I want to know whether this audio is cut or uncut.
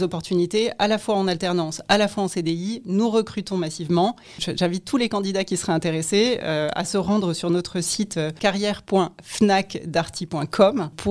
uncut